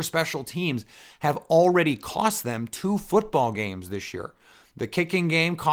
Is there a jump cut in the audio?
no; 0 cuts

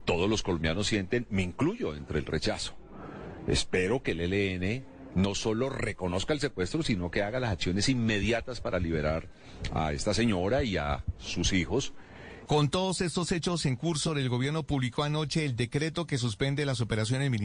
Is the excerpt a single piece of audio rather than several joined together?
no; 1 cut; at 14.1 s

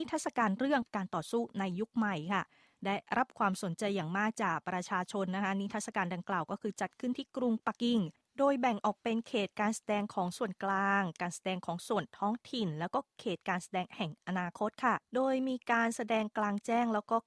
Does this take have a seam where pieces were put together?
yes; 1 cut; at 7.8 s

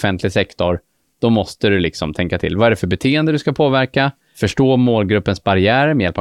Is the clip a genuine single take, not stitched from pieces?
yes; 0 cuts

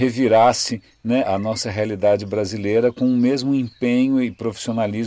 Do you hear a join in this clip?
yes; 1 cut; at 1.2 s

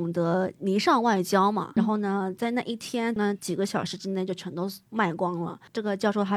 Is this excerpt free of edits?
no; 2 cuts; at 1.8 s, 3.2 s

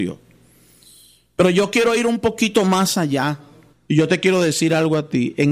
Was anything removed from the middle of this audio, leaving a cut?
yes; 1 cut; at 3.7 s

